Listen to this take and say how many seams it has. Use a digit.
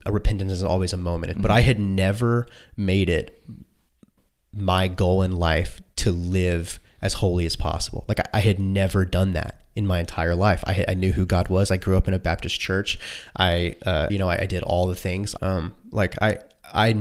3